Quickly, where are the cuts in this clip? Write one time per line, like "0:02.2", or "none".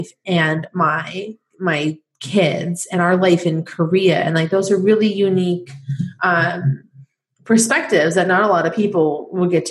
none